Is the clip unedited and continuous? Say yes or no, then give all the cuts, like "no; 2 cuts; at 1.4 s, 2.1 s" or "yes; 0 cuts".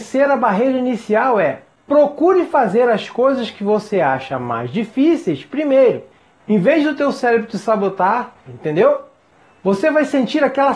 no; 2 cuts; at 6.4 s, 8.5 s